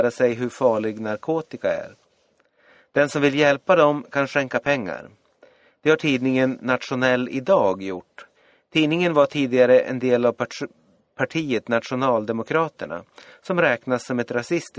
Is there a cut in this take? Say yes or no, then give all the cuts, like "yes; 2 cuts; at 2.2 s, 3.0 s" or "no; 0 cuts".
no; 0 cuts